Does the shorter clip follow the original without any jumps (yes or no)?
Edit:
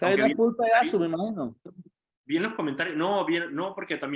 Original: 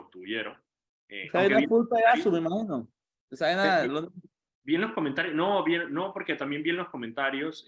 no